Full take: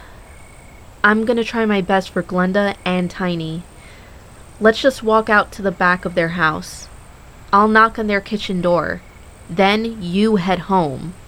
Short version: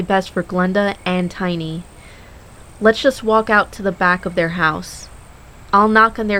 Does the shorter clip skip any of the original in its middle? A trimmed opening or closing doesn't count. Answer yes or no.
no